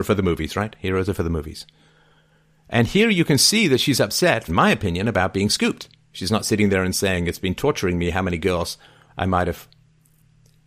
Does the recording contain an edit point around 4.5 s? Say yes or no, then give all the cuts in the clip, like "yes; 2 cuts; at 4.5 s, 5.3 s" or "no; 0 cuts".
yes; 1 cut; at 4.5 s